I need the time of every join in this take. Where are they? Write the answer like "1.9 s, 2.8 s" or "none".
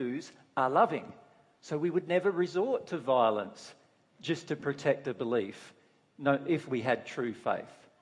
none